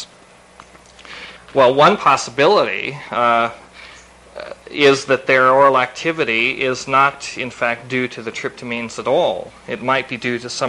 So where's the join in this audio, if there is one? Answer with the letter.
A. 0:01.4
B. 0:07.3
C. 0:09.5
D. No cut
D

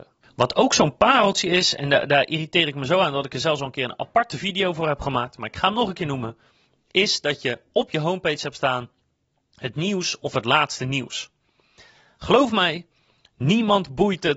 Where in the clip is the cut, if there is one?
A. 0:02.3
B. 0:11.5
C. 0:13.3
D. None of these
D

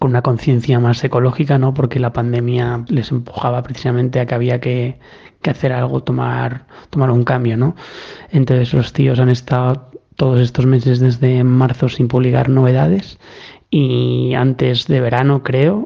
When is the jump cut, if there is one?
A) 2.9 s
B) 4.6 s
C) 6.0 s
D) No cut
A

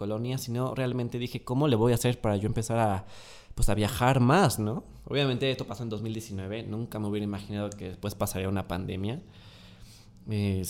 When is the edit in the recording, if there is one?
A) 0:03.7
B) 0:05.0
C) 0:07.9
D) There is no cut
D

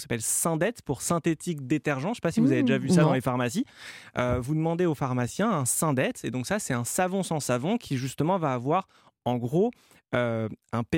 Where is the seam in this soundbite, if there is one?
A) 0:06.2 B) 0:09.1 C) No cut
C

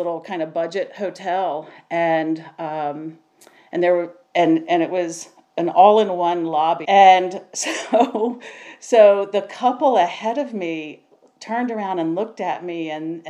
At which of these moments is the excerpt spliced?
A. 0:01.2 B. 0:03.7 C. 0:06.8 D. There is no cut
C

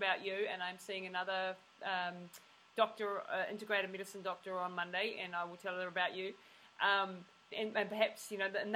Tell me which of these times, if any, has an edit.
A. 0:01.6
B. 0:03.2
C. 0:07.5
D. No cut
C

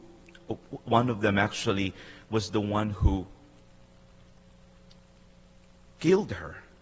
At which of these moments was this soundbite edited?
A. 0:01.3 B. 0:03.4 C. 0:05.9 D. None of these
D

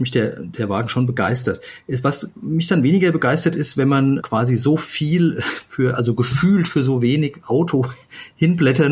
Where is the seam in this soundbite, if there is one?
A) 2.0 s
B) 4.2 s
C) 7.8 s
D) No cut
B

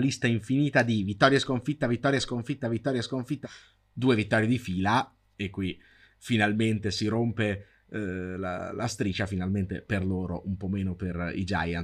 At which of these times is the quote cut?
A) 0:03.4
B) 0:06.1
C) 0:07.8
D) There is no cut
A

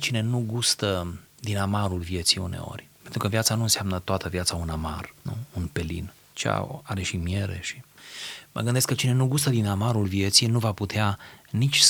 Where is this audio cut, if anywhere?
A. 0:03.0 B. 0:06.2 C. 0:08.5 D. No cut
D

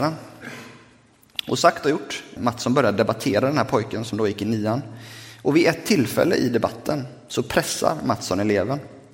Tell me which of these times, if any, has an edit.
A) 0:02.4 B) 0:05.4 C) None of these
A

